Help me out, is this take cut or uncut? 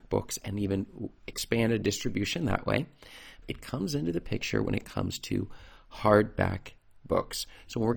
cut